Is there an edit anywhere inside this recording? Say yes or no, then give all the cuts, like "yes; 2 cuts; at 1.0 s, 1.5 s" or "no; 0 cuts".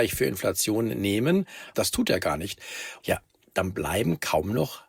yes; 2 cuts; at 1.7 s, 3.0 s